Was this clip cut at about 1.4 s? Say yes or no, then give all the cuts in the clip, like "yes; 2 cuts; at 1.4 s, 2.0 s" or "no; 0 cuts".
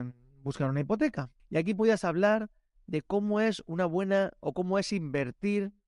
yes; 1 cut; at 1.4 s